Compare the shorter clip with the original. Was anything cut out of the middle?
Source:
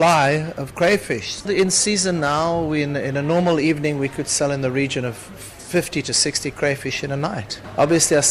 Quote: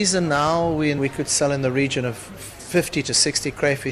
yes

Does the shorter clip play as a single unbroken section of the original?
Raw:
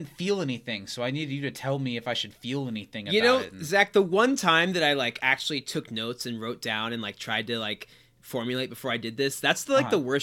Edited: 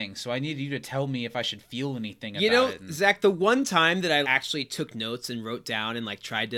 no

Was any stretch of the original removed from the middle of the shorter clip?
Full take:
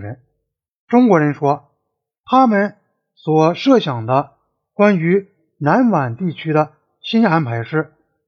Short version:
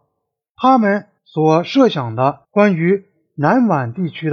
yes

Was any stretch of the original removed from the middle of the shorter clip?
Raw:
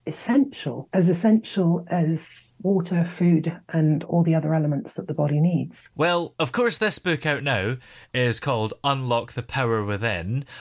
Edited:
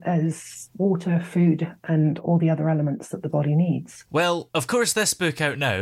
no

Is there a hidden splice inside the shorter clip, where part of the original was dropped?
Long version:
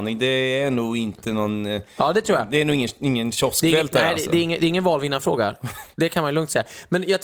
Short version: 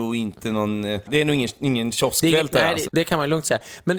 yes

